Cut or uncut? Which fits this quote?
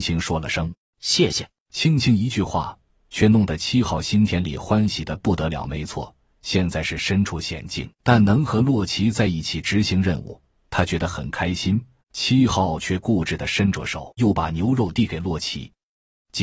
cut